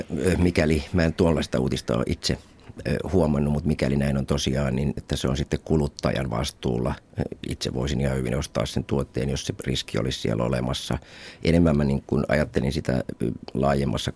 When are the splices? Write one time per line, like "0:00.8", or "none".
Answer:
0:05.0